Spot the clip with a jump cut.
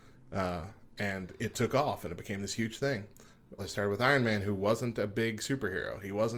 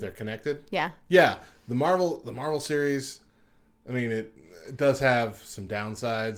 first; 1 cut; at 3.6 s

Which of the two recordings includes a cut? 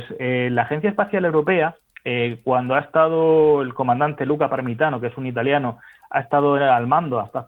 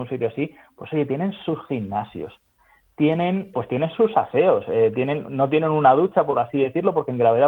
second; 1 cut; at 3.5 s

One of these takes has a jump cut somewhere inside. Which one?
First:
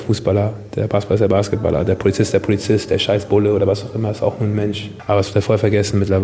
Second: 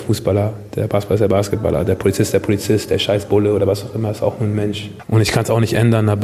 second; 1 cut; at 5.0 s

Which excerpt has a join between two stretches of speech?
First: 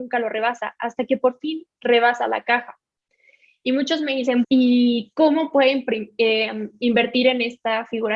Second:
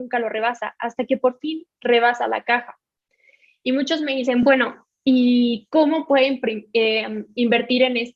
first; 1 cut; at 4.4 s

